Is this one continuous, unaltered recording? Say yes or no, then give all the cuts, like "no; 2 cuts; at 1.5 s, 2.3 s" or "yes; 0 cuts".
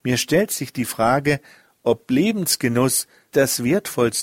no; 1 cut; at 3.3 s